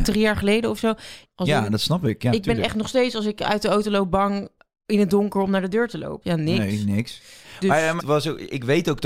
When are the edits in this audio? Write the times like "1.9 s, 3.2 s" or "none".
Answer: 1.2 s, 6.2 s, 8.0 s